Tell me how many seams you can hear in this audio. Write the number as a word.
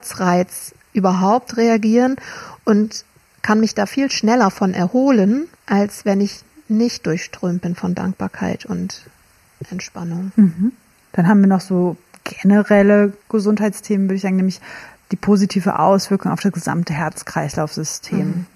three